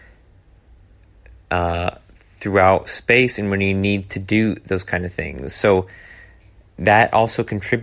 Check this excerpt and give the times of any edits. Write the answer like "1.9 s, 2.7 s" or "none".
none